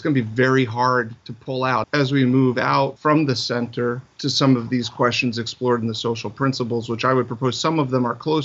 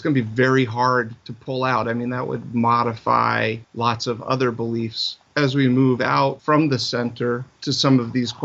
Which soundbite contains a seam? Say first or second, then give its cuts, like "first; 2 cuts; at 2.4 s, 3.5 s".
first; 1 cut; at 1.8 s